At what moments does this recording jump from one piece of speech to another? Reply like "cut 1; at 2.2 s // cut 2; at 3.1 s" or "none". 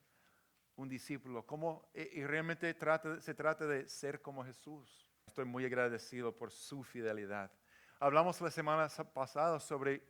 cut 1; at 5.3 s // cut 2; at 7.9 s